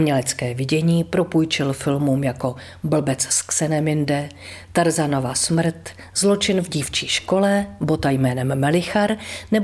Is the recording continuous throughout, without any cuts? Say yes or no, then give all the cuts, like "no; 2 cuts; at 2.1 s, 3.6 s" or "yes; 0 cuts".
yes; 0 cuts